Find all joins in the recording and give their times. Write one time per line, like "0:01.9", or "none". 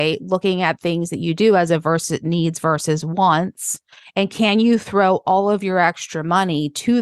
none